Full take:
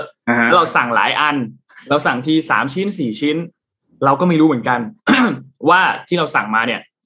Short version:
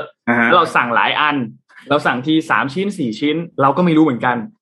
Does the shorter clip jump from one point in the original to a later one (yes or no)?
yes